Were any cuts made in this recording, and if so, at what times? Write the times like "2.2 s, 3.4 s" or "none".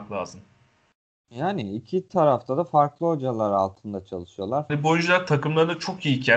4.7 s